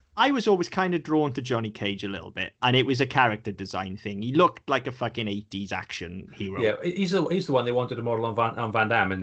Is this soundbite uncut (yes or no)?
no